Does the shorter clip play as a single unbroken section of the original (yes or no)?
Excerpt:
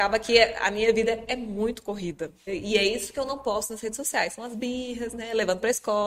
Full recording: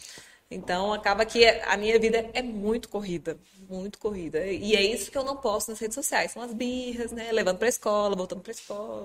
no